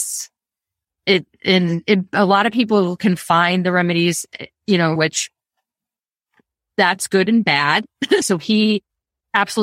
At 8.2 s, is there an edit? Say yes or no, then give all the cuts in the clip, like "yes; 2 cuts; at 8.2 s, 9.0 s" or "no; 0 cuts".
yes; 2 cuts; at 5.0 s, 8.2 s